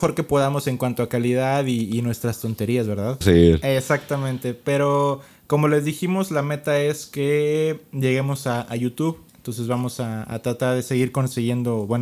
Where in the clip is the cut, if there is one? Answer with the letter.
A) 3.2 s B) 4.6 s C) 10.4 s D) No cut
A